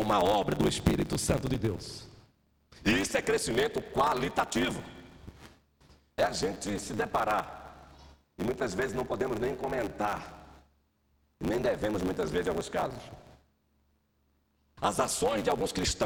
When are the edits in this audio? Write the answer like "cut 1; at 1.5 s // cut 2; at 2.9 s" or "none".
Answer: cut 1; at 6.1 s // cut 2; at 14.8 s